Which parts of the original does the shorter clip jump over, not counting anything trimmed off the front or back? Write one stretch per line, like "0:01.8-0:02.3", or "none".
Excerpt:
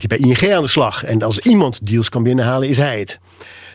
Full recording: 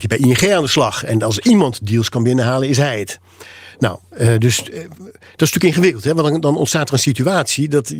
none